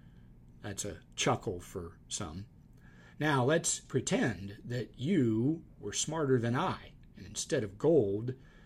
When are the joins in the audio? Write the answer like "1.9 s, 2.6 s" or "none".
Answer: 3.9 s